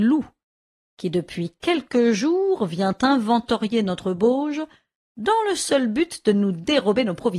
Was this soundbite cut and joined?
no; 0 cuts

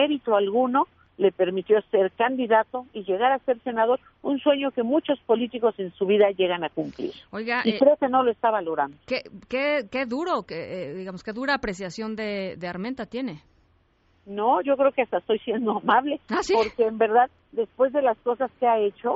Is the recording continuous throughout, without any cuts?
yes; 0 cuts

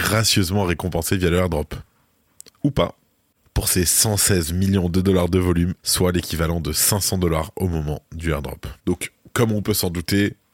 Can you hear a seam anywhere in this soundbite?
yes; 2 cuts; at 5.8 s, 8.8 s

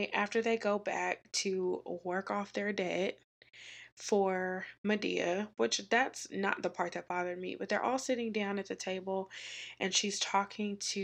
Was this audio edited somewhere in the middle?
no; 0 cuts

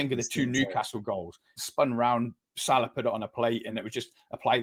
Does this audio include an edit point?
yes; 2 cuts; at 1.6 s, 3.7 s

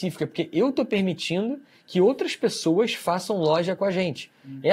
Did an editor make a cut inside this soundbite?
no; 0 cuts

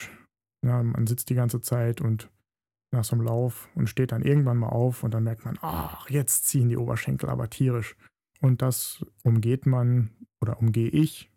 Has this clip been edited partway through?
yes; 1 cut; at 8.3 s

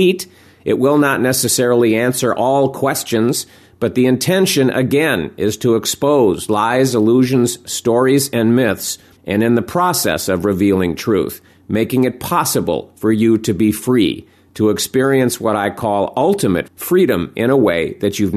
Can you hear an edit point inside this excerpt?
yes; 2 cuts; at 9.2 s, 16.7 s

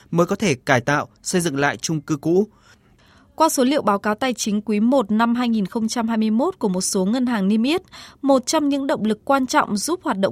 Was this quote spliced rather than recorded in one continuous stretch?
no; 0 cuts

